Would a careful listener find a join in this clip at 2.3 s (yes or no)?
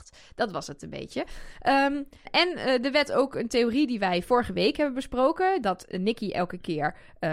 yes